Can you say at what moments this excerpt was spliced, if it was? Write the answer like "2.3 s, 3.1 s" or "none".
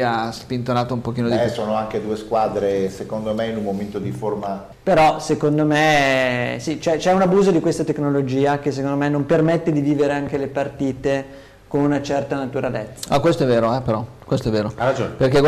4.7 s